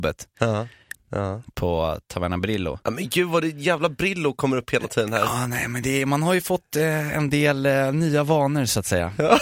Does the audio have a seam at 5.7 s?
no; 1 cut; at 0.9 s

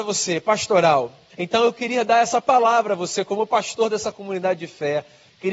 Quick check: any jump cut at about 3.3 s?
no; 1 cut; at 1.3 s

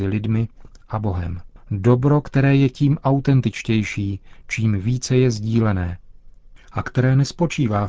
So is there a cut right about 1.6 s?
yes; 1 cut; at 1.6 s

